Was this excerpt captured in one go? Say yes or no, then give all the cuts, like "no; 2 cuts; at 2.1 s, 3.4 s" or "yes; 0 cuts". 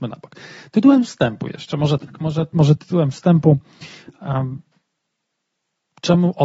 yes; 0 cuts